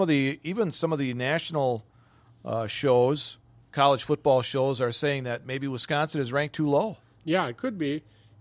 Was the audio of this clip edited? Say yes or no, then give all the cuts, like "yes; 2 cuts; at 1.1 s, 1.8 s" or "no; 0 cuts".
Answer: no; 0 cuts